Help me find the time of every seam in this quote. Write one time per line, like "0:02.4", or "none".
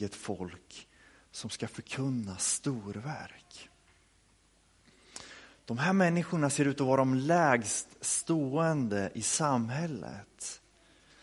none